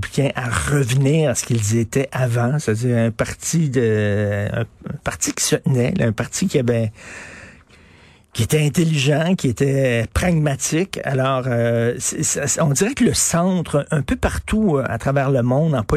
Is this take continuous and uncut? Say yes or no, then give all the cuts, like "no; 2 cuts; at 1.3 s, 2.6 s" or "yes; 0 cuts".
yes; 0 cuts